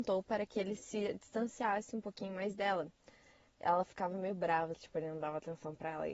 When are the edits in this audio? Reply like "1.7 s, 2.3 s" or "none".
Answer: 4.7 s